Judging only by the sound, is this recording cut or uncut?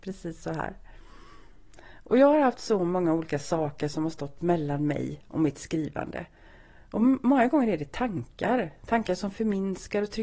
uncut